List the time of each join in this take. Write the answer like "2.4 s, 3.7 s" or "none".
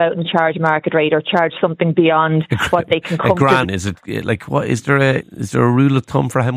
3.6 s, 5.2 s